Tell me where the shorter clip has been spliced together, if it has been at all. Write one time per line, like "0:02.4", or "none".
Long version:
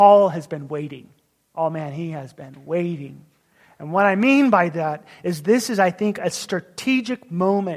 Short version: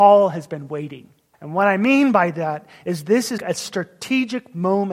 0:01.3
0:03.4